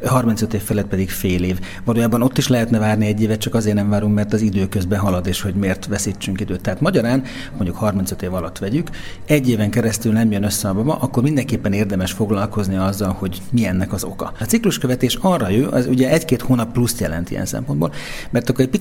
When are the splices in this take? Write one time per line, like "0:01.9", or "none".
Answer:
0:07.5

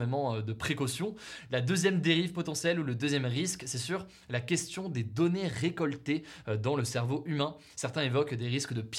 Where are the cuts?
none

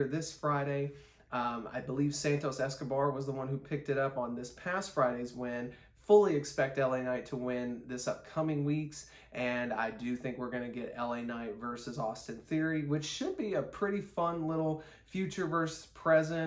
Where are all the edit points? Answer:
none

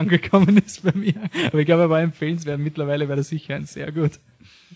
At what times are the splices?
none

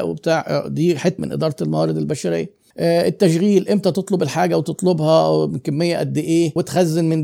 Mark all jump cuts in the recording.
0:01.2
0:02.7

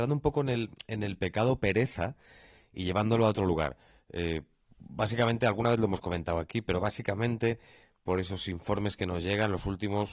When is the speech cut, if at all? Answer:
none

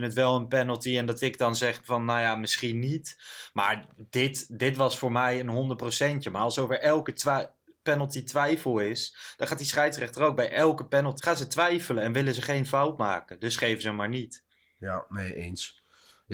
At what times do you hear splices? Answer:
0:11.2

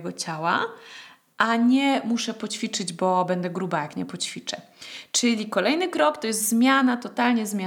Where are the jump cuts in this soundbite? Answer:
none

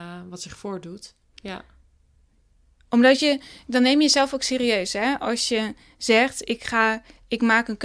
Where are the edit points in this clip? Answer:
0:01.2

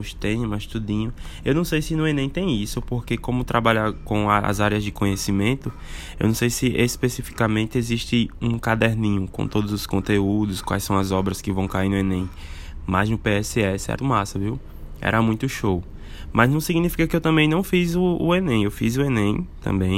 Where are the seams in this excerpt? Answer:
0:14.0

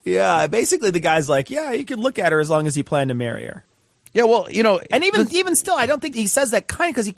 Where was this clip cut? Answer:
0:06.1

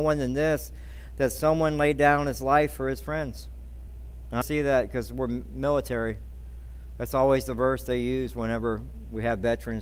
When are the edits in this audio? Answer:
0:04.4

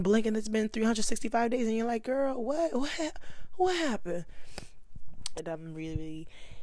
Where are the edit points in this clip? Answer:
0:05.4

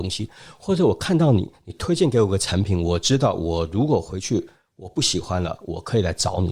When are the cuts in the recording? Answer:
none

